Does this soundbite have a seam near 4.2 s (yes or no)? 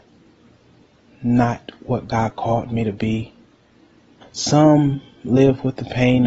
yes